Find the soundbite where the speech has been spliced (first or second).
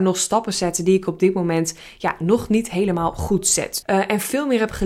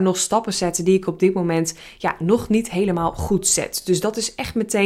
first